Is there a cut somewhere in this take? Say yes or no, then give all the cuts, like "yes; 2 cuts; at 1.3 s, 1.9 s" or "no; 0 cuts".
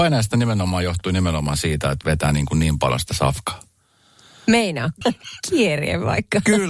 yes; 1 cut; at 5.0 s